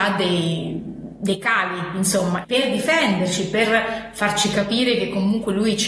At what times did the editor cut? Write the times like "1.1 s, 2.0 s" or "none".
2.4 s